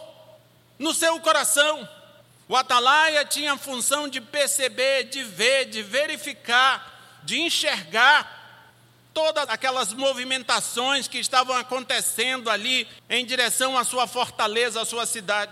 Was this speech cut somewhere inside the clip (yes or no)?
yes